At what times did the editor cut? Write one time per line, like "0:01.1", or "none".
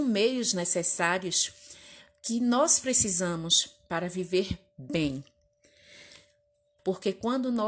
0:06.8